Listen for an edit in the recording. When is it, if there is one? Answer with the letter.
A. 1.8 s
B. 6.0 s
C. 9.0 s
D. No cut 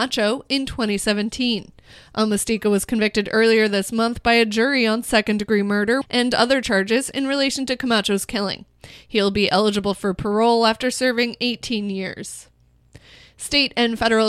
B